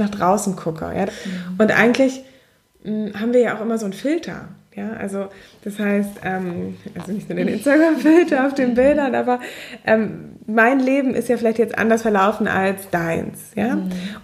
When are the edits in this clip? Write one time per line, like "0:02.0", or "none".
0:01.1